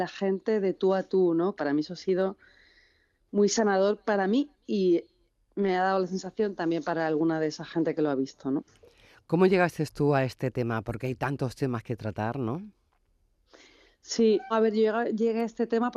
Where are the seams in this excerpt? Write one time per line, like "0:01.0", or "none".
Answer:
0:01.6
0:14.5